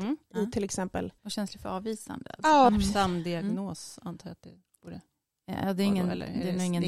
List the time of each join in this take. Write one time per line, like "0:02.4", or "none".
0:01.2
0:02.7